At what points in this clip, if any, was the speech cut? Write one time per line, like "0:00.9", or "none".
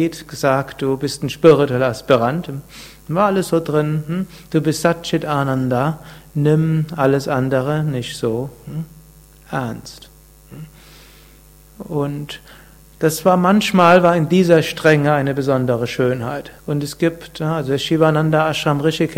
0:16.6